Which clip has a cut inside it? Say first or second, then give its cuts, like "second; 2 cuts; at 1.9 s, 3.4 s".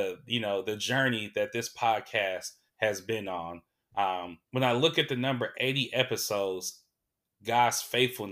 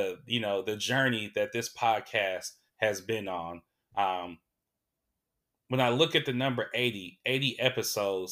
first; 3 cuts; at 4.4 s, 5.5 s, 7.2 s